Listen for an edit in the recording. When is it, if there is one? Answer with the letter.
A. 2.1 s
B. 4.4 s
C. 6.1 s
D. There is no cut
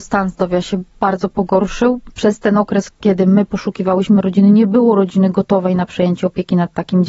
D